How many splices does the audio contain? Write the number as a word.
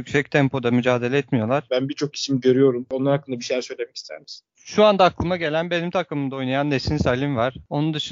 one